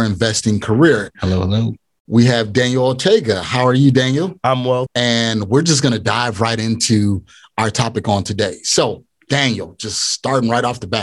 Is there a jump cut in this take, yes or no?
yes